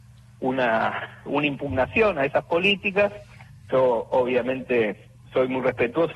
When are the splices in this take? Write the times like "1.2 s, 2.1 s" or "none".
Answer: 1.3 s, 3.7 s